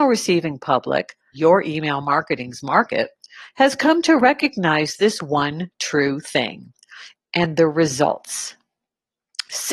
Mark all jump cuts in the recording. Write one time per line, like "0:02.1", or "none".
0:01.3
0:07.2